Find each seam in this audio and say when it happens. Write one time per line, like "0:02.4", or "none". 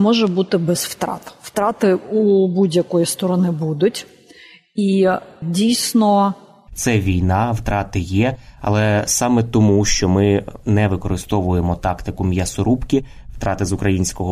0:06.7